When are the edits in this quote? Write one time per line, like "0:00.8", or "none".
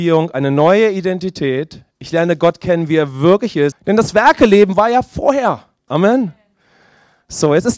0:03.7
0:05.9

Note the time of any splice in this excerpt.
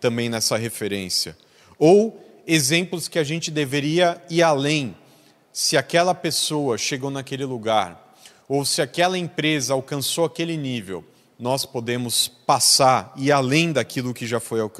none

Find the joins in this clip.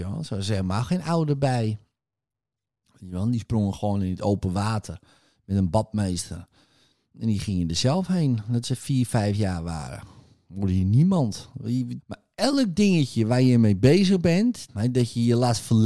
0:12.0
0:14.7

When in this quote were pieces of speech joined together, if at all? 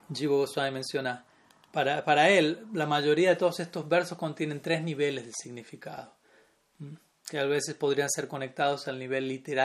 0:01.7

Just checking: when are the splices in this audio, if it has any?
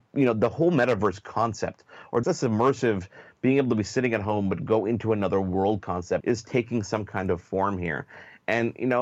0:02.2
0:06.2

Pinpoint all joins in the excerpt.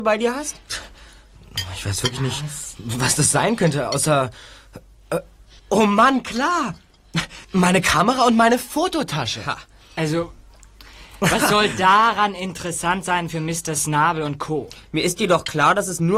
0:05.6
0:07.4
0:14.8

